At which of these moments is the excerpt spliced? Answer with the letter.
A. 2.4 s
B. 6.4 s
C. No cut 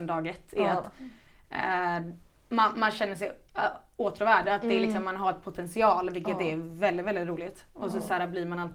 C